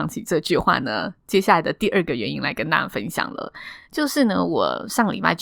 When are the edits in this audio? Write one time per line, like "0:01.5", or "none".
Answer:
none